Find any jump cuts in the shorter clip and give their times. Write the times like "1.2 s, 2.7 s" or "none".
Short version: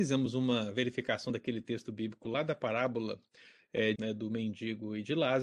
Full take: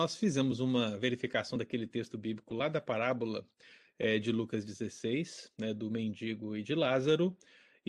4.0 s